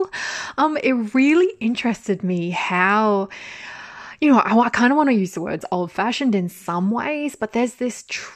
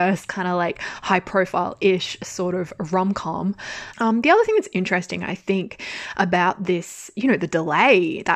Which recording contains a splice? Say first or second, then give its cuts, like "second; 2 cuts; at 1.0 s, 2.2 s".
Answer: second; 1 cut; at 3.9 s